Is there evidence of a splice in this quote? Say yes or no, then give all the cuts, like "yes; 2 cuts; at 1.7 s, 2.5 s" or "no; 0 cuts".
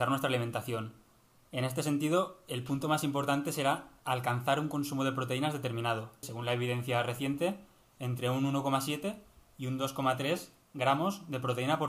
yes; 1 cut; at 6.2 s